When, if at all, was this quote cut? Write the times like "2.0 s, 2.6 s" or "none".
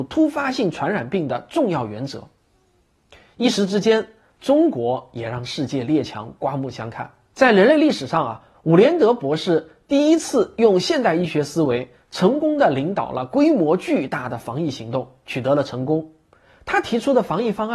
4.3 s, 7.3 s